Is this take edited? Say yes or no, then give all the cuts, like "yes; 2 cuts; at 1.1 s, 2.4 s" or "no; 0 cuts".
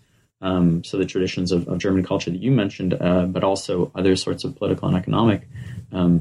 no; 0 cuts